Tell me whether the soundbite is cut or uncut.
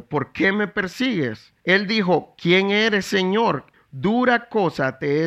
cut